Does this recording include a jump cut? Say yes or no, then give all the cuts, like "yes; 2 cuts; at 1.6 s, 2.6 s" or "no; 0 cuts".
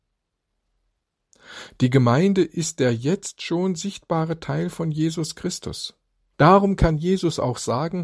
yes; 1 cut; at 6.3 s